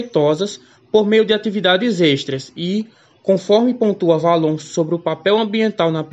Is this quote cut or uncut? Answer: uncut